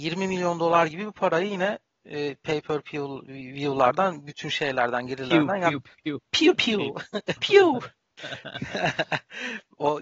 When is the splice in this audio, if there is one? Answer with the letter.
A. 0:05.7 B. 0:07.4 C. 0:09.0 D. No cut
B